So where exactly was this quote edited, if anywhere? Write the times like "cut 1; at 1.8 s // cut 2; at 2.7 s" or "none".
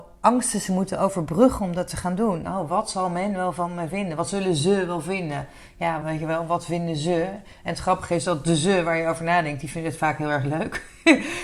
cut 1; at 2.4 s // cut 2; at 6.0 s